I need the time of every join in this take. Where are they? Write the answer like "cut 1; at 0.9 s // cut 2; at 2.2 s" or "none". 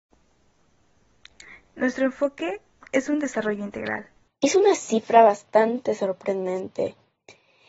cut 1; at 1.7 s // cut 2; at 4.3 s